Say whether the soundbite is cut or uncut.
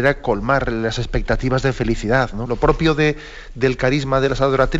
cut